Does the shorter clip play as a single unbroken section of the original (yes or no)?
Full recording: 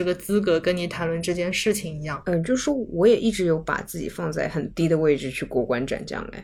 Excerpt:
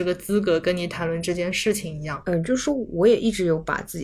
yes